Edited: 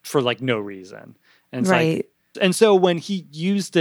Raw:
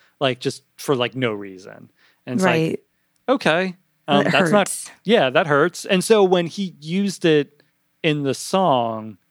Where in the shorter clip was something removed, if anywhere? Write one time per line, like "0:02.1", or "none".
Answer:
0:02.3